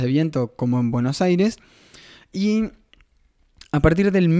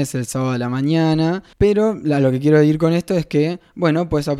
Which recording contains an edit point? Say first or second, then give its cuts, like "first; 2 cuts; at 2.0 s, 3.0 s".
second; 1 cut; at 1.5 s